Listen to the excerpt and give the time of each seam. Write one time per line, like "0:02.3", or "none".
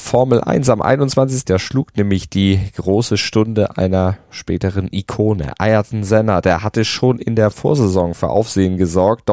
0:01.4

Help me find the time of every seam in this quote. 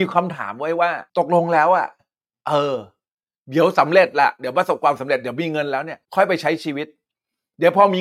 0:01.1
0:06.1

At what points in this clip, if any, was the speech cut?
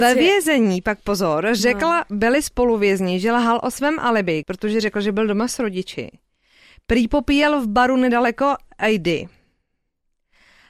0:04.4

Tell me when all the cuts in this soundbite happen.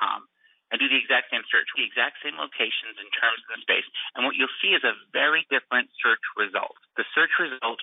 0:06.9

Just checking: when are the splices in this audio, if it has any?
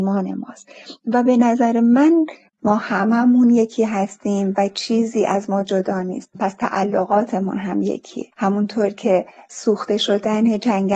0:08.3

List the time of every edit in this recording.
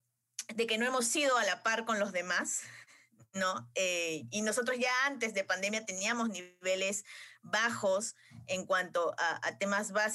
none

